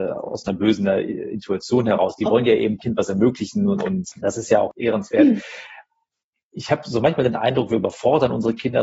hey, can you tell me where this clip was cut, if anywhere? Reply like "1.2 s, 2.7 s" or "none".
none